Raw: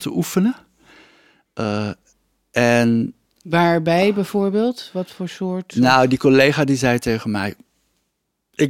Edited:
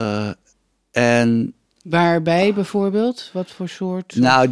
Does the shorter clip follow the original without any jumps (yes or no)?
yes